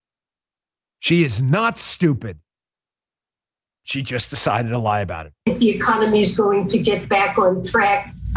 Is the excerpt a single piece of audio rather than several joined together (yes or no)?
no